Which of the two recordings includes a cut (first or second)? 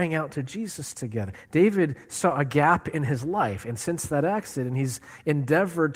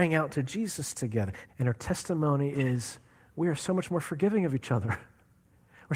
second